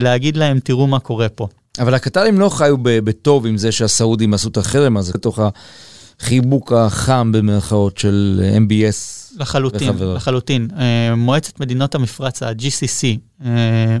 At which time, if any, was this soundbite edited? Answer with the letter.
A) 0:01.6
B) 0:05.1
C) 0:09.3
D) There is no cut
B